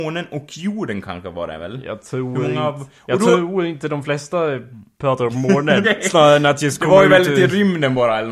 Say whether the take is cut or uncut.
cut